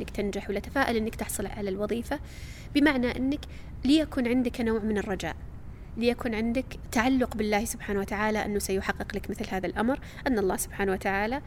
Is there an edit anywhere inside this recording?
yes; 1 cut; at 1.5 s

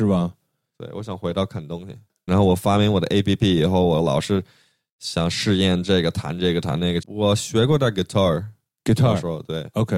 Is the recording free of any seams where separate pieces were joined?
no; 2 cuts; at 2.3 s, 7.0 s

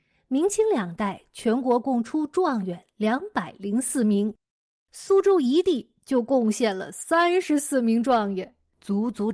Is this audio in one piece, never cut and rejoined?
yes; 0 cuts

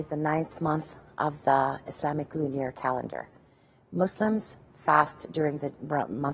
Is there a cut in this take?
no; 0 cuts

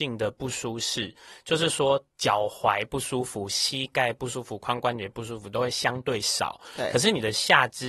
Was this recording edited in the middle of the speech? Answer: no; 0 cuts

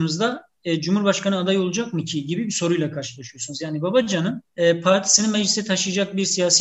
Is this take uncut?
yes; 0 cuts

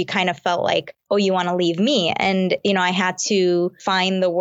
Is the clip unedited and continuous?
yes; 0 cuts

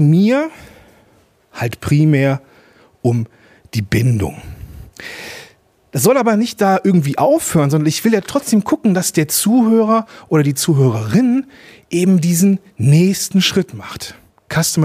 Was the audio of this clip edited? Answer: no; 0 cuts

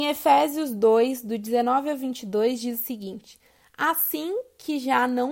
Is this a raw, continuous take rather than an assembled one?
yes; 0 cuts

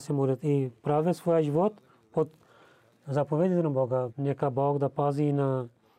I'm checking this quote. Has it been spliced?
yes; 1 cut; at 4.1 s

